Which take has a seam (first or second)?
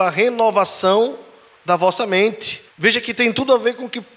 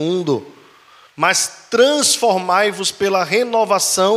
first